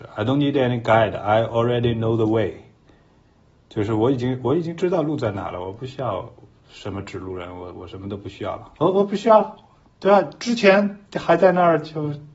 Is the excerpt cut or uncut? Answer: cut